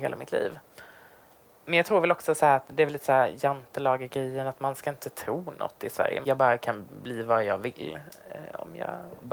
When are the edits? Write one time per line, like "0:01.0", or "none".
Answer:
0:06.2